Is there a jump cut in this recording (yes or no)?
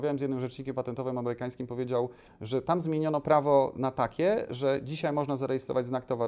yes